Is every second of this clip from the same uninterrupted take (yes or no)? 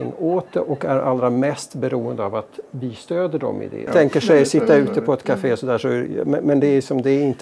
no